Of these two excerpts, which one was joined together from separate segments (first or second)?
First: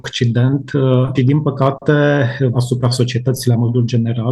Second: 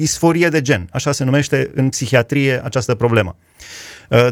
first